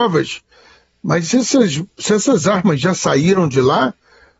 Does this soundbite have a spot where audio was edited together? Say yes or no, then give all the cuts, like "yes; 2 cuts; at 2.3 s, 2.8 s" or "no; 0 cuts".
no; 0 cuts